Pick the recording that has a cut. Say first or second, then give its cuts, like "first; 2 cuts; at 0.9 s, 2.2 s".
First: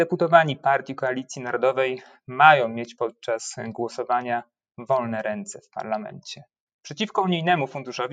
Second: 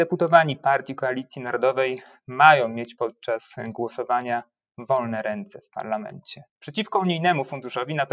second; 1 cut; at 6.5 s